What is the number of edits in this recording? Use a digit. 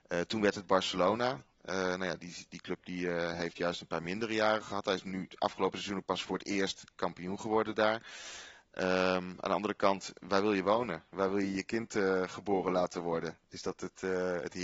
0